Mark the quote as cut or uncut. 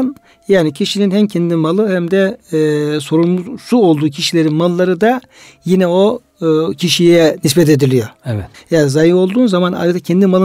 cut